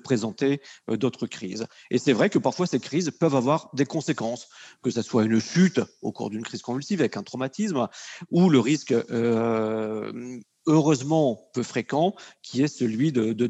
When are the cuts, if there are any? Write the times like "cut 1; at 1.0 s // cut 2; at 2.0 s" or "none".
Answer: none